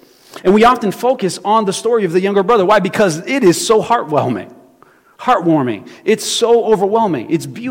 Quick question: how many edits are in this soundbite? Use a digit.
0